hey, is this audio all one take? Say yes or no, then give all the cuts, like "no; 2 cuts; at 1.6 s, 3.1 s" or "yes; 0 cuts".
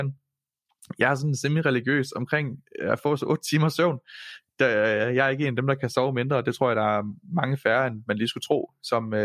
yes; 0 cuts